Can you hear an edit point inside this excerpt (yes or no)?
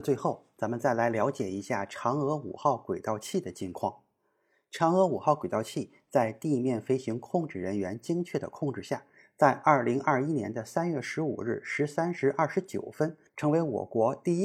yes